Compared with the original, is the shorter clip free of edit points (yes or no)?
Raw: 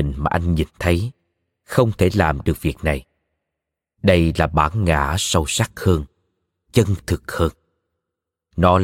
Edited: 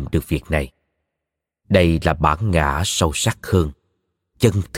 yes